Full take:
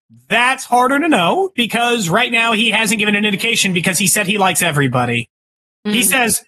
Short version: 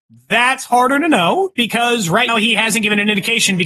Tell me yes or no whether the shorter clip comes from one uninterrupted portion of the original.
no